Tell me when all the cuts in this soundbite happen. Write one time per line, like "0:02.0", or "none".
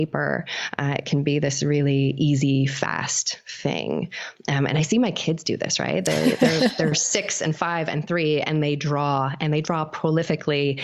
none